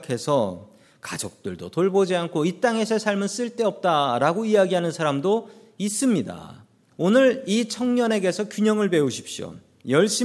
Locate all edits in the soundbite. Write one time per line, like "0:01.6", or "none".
0:06.9